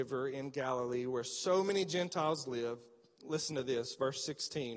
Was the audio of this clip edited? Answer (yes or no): no